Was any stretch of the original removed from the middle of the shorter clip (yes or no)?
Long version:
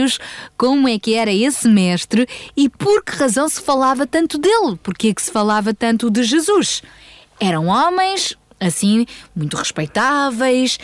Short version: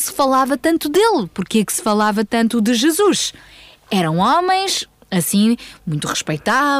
no